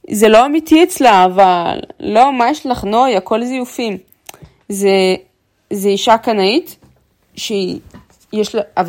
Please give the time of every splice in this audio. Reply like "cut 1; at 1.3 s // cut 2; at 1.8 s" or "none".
none